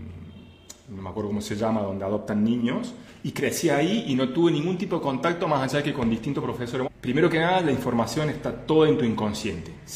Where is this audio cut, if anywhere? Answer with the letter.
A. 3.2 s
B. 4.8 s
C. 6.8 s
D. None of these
C